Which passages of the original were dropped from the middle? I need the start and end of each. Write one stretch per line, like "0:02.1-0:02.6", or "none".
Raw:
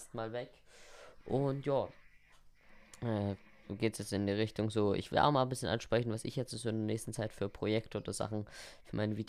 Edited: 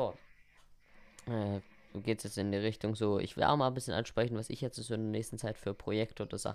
none